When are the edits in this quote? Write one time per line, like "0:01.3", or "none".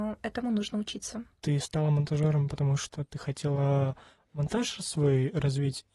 none